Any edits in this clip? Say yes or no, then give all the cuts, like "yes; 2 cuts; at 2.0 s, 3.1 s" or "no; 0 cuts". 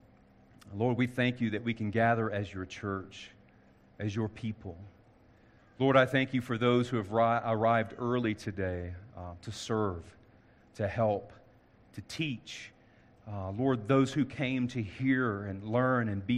no; 0 cuts